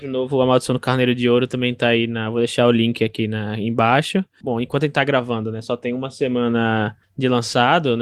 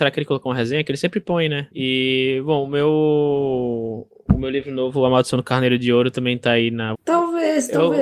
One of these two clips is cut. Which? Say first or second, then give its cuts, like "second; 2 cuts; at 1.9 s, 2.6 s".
second; 2 cuts; at 1.7 s, 6.9 s